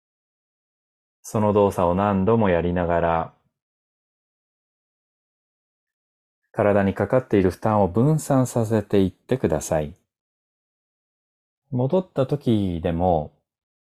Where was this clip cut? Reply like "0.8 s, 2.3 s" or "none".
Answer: 11.5 s